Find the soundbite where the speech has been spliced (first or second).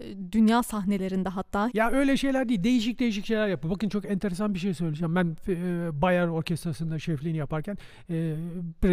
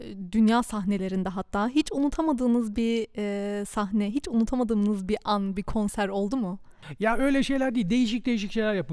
first